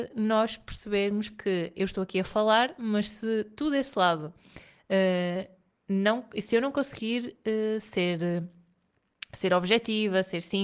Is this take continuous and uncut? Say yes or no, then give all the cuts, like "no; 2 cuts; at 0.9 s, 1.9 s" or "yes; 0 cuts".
yes; 0 cuts